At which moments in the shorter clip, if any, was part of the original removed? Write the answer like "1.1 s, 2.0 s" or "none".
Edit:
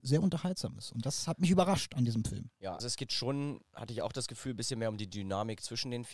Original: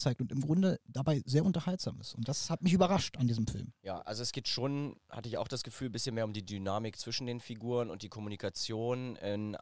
2.8 s